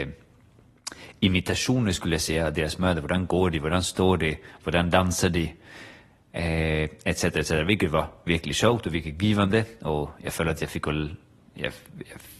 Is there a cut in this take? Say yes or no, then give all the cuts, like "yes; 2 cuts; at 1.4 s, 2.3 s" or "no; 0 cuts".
no; 0 cuts